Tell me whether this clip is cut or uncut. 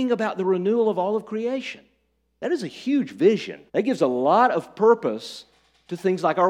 cut